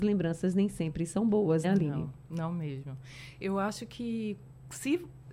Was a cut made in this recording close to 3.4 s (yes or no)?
no